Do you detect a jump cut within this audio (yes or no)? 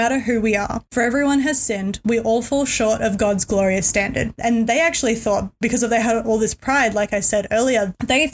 yes